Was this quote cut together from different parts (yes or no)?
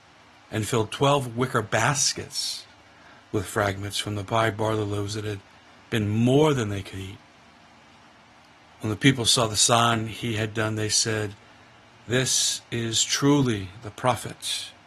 no